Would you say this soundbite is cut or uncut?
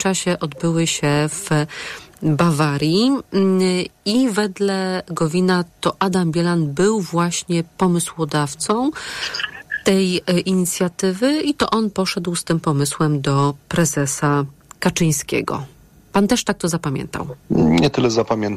cut